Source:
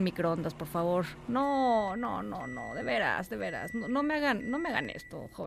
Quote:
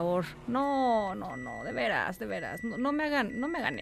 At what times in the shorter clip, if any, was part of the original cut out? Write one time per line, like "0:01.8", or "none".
0:01.1